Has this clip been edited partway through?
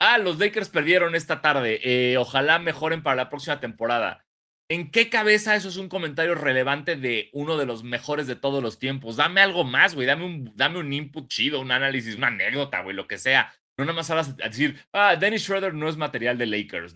no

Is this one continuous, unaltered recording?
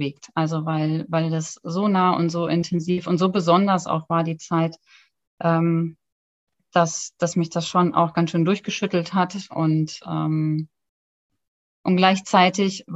yes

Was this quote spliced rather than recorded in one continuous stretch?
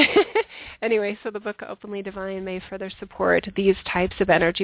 no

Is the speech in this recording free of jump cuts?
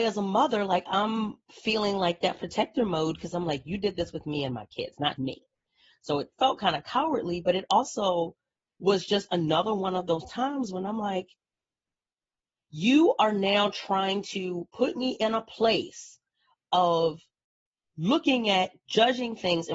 no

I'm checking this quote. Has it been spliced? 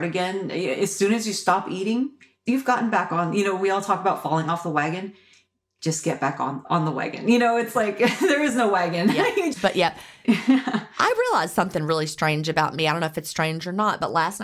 yes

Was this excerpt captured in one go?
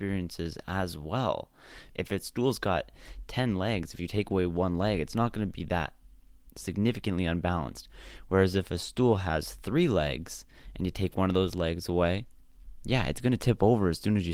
no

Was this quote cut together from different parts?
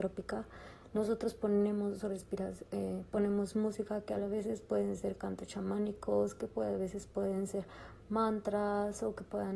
no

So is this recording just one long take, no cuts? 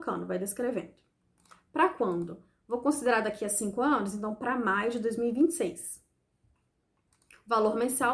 yes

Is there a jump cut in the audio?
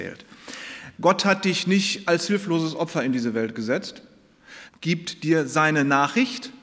yes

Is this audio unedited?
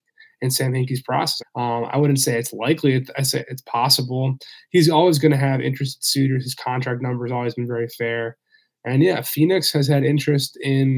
no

